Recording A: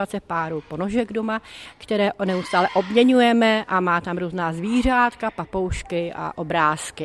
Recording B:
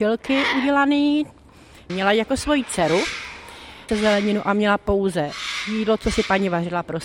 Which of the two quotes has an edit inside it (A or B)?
B